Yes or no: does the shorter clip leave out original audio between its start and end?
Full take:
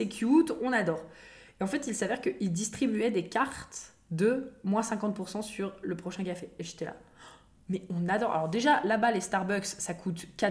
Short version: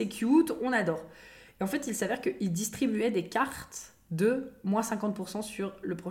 no